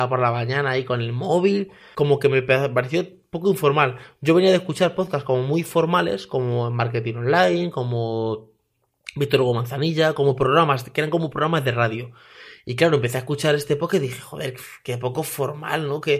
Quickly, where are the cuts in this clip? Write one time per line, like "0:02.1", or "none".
0:01.9